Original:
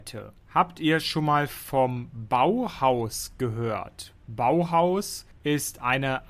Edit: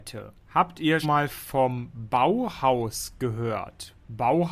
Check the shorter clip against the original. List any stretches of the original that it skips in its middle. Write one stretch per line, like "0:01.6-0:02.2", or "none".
0:01.0-0:01.2